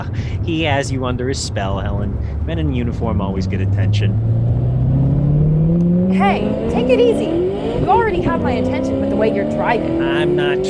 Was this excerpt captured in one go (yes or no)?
yes